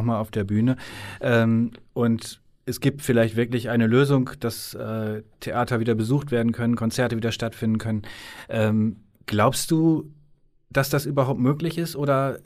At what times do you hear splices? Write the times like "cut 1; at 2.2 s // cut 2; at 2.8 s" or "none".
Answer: none

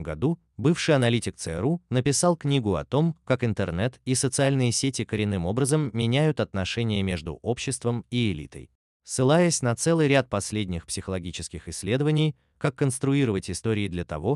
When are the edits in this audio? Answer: cut 1; at 8.9 s // cut 2; at 12.5 s

